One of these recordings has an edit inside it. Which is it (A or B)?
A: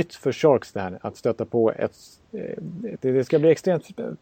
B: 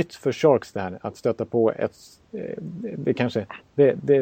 A